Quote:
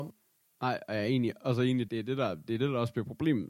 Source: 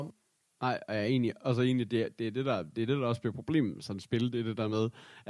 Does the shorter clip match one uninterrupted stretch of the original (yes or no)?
no